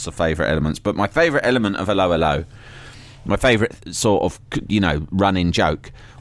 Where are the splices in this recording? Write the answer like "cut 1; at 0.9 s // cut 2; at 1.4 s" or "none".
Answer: none